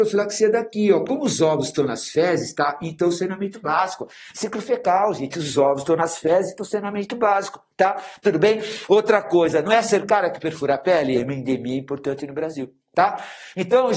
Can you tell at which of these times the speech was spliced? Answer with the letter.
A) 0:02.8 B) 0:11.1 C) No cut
B